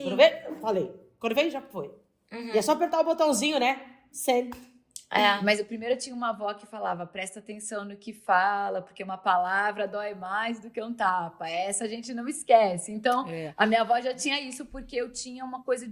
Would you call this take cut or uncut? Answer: uncut